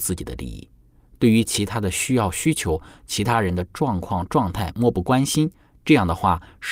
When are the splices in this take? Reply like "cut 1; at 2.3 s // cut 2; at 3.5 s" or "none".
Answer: none